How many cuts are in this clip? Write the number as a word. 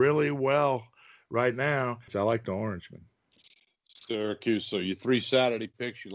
one